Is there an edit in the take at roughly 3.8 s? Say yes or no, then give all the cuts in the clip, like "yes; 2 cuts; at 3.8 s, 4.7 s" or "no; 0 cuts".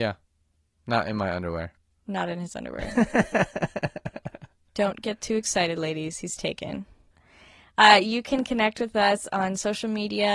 no; 1 cut; at 7.1 s